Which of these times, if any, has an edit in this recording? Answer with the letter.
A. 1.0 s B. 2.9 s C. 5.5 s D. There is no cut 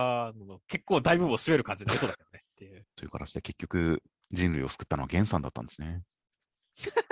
B